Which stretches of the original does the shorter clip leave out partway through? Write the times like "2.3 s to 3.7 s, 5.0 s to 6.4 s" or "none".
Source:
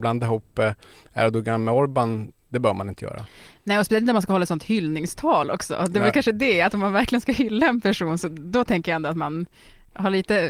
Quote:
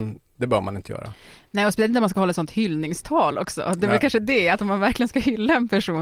none